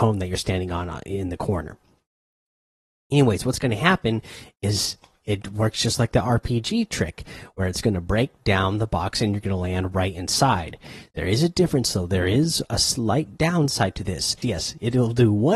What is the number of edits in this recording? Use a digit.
1